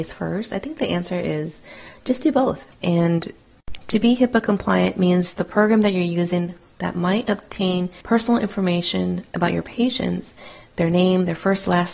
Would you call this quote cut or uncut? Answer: cut